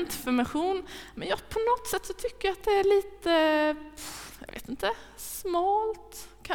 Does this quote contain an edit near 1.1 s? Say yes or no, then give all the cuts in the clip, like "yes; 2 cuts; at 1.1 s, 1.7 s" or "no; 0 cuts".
no; 0 cuts